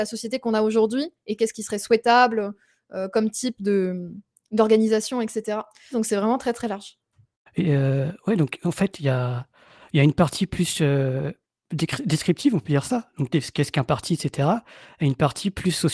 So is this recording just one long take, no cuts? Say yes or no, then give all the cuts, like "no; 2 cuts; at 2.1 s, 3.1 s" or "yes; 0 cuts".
no; 1 cut; at 5.9 s